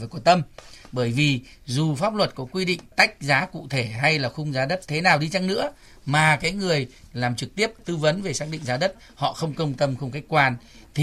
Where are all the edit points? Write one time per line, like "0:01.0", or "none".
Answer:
none